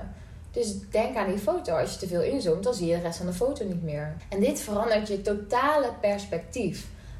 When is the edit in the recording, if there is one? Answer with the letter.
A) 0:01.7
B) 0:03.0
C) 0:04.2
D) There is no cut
C